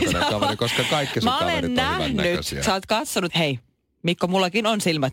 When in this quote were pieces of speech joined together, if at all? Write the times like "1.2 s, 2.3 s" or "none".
3.3 s